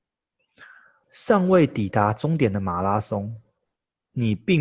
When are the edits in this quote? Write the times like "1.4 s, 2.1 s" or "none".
1.0 s